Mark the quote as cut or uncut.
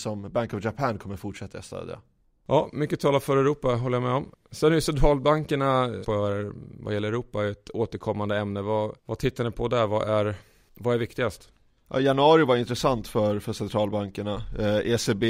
cut